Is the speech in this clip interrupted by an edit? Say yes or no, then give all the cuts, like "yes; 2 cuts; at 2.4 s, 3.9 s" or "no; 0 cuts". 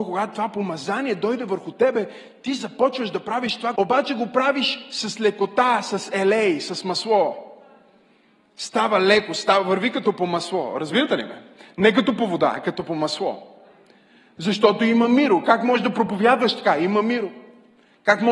yes; 1 cut; at 3.8 s